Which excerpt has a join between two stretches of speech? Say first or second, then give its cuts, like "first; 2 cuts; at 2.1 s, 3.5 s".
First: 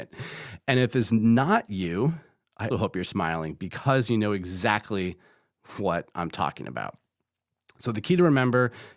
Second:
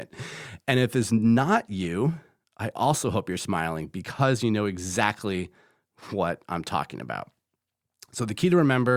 first; 1 cut; at 2.7 s